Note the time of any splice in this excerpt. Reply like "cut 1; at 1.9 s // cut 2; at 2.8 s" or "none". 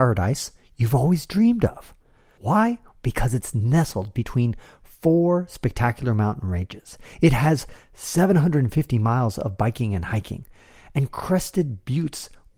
cut 1; at 2.4 s